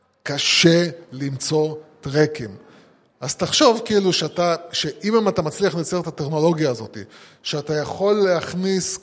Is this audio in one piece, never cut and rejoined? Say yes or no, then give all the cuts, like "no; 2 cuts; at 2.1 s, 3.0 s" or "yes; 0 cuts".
yes; 0 cuts